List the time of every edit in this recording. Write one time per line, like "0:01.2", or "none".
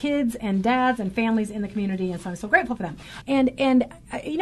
0:03.2

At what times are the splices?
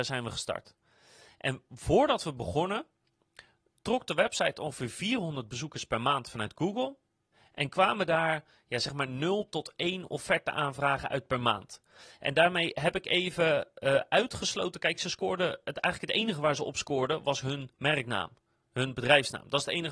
none

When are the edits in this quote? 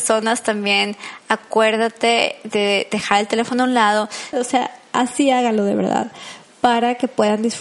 0:04.3

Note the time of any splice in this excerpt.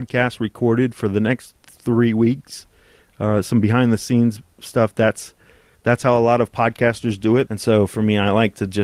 0:07.5

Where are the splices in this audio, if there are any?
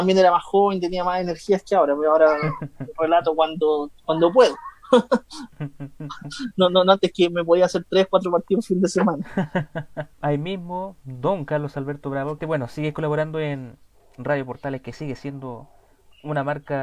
0:10.1
0:12.4

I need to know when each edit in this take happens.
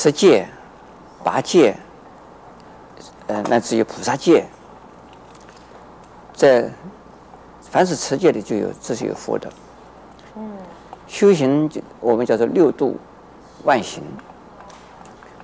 0:10.3

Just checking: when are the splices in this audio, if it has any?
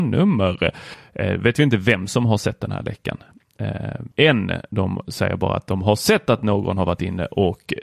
0:04.1

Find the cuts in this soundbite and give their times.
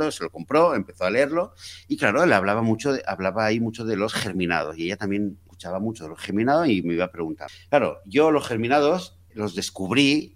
0:09.3

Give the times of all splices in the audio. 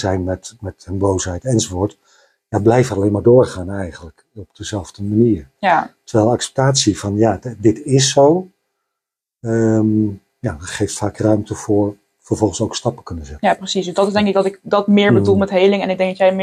none

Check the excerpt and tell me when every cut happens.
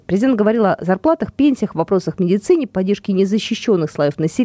none

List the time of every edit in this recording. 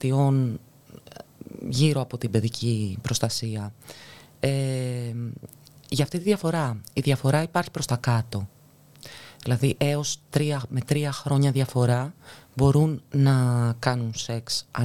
none

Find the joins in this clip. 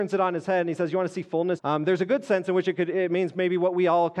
0:01.6

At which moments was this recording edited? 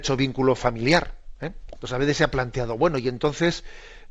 0:01.7

